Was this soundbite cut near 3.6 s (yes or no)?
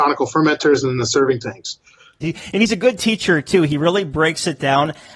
no